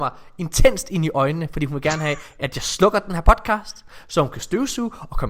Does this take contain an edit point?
no; 0 cuts

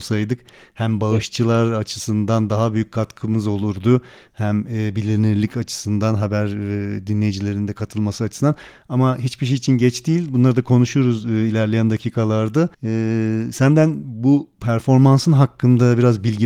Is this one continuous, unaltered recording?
no; 1 cut; at 12.7 s

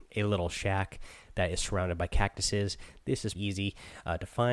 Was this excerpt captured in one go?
no; 1 cut; at 3.3 s

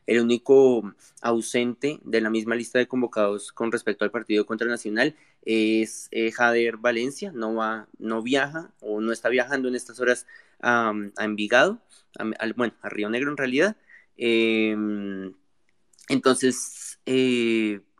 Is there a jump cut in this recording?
no; 0 cuts

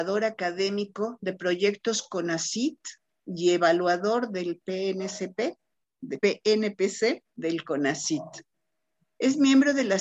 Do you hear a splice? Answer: yes; 2 cuts; at 6.2 s, 7.3 s

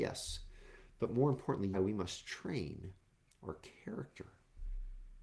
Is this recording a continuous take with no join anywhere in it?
no; 1 cut; at 1.7 s

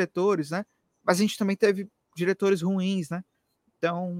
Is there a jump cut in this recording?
no; 0 cuts

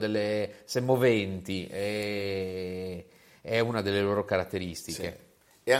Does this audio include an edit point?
no; 0 cuts

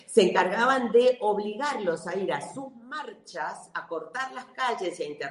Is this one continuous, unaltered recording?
yes; 0 cuts

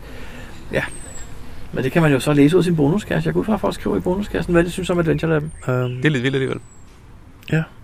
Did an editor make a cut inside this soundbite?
yes; 1 cut; at 5.6 s

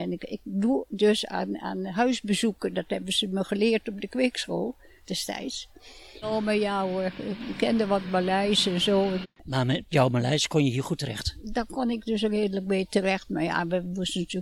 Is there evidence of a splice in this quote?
yes; 2 cuts; at 6.2 s, 9.2 s

